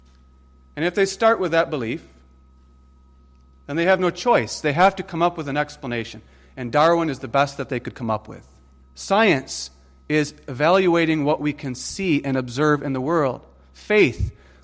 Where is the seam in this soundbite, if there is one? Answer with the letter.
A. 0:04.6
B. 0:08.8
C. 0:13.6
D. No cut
B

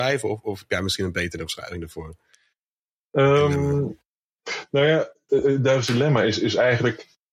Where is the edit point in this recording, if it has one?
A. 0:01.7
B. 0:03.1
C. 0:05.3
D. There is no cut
C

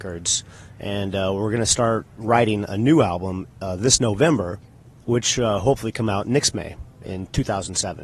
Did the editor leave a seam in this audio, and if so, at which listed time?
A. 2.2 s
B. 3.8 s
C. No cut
A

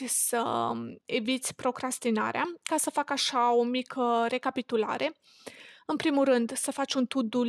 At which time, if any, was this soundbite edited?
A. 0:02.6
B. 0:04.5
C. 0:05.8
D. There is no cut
D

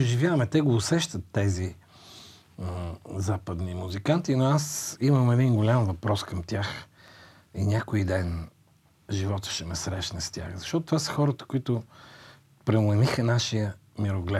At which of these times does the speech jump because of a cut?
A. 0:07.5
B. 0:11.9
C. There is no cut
C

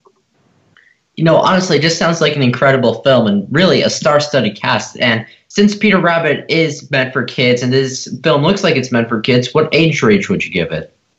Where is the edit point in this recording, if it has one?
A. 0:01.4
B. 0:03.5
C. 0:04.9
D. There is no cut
D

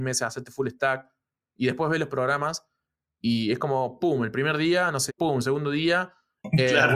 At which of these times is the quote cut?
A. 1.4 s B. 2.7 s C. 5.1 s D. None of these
C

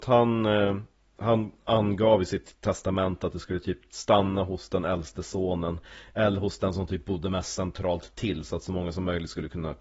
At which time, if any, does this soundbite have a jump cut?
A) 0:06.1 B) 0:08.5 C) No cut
C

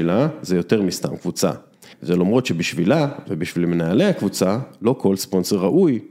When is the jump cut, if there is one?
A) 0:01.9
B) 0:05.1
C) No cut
A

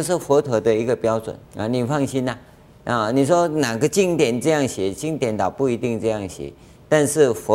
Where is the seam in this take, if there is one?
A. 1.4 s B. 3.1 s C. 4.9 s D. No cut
A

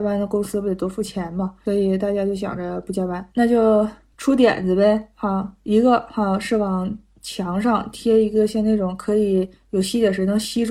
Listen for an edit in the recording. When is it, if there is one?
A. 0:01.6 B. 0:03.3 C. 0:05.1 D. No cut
B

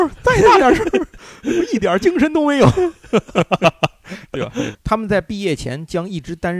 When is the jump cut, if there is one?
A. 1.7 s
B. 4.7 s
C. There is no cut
B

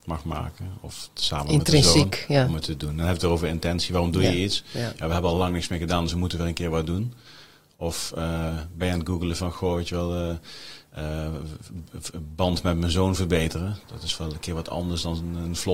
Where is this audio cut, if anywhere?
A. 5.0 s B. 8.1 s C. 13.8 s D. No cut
C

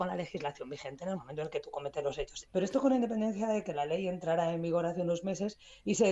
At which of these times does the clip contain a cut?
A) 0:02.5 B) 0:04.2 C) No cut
A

